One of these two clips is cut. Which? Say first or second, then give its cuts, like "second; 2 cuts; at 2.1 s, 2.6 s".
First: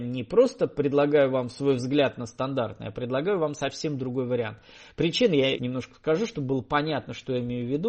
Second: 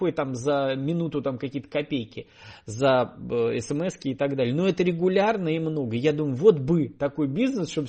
first; 1 cut; at 5.6 s